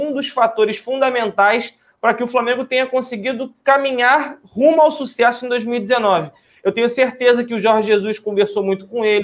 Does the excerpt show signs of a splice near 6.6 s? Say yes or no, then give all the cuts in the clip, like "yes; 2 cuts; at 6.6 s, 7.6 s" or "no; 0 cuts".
no; 0 cuts